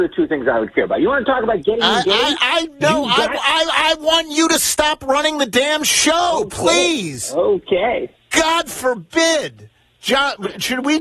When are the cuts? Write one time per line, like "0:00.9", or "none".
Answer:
none